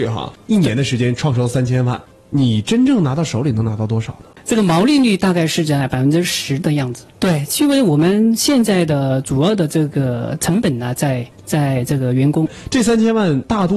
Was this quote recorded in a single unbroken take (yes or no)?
no